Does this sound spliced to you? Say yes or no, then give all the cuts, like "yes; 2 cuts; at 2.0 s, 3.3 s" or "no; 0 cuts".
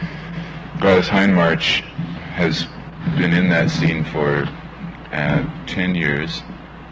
yes; 1 cut; at 2.2 s